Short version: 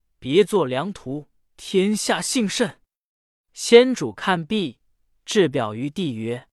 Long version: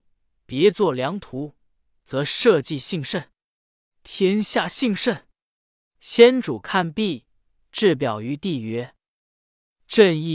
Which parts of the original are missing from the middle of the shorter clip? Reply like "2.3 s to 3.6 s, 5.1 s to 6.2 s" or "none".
1.7 s to 3.9 s